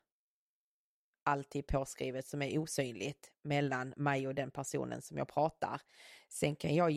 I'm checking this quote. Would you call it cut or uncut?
uncut